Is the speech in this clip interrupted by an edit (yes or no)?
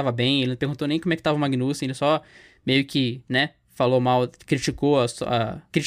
no